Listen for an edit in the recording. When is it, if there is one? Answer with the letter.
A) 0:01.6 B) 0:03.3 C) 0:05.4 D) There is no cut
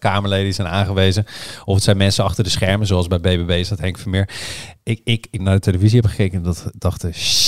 C